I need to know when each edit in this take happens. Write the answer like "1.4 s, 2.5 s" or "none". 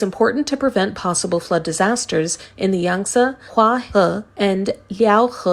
4.3 s